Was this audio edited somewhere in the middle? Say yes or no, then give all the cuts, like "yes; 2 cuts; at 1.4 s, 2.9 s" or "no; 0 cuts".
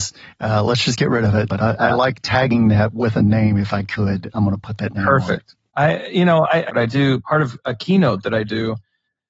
yes; 2 cuts; at 1.5 s, 6.7 s